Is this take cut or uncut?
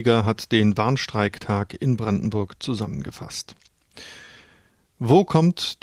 uncut